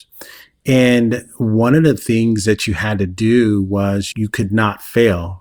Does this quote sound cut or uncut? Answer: cut